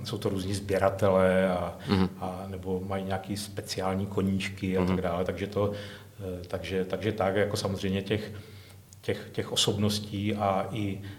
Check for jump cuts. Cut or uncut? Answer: uncut